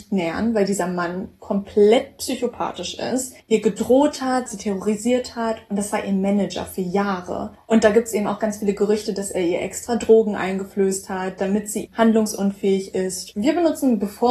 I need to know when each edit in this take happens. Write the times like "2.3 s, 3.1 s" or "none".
4.5 s, 11.9 s, 13.3 s